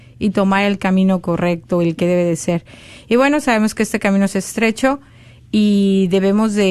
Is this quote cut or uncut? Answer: uncut